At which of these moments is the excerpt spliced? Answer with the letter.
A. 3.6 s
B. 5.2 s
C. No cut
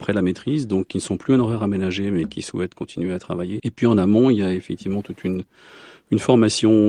A